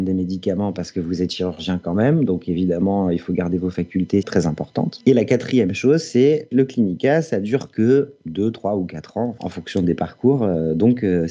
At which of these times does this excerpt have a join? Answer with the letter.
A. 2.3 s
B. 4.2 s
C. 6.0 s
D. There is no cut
B